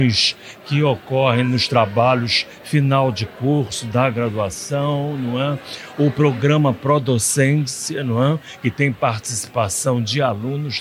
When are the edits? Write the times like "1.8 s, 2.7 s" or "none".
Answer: none